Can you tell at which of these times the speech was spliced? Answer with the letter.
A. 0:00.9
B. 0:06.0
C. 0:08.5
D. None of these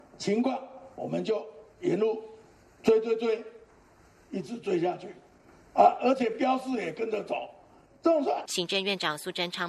C